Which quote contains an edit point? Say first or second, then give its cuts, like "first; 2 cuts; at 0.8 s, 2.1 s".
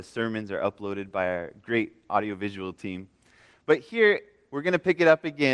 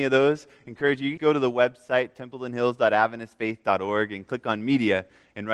second; 1 cut; at 1.2 s